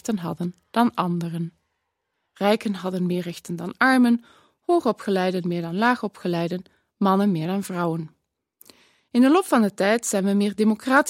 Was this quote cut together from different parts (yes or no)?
no